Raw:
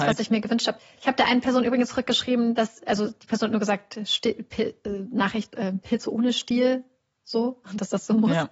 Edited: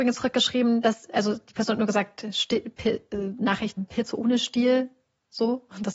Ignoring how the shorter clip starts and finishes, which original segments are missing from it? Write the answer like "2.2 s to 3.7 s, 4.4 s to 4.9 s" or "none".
5.5 s to 5.7 s